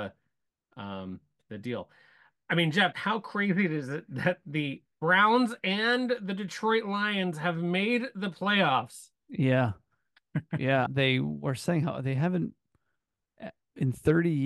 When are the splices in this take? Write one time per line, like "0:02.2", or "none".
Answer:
0:02.9
0:10.9

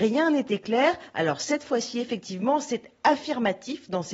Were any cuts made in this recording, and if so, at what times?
none

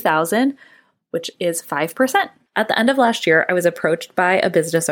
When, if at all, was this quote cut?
0:02.5

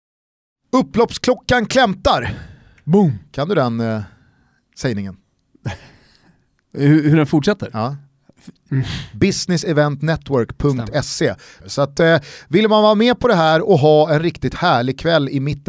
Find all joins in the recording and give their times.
0:08.7
0:11.6

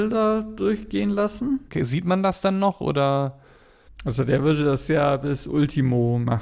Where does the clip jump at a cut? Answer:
0:01.7
0:03.9

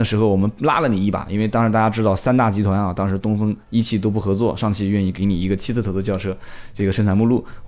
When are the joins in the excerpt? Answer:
none

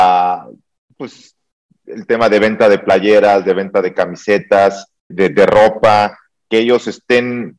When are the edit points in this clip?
0:05.1
0:06.4

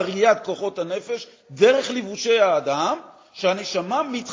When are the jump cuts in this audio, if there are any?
none

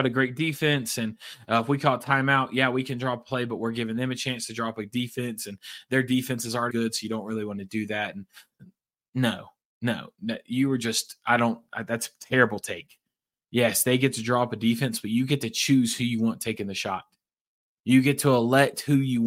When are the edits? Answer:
0:06.7

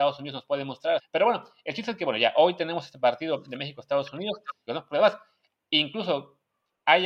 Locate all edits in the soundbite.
0:01.0
0:04.7

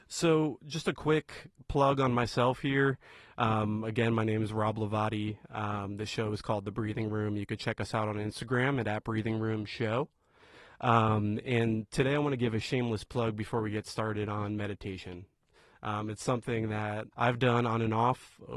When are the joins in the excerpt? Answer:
0:17.1

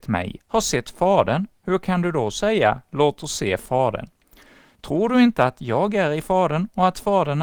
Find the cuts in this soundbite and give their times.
none

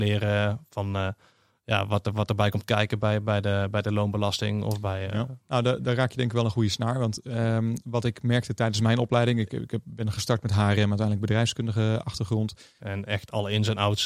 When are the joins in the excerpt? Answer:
0:05.4
0:12.8

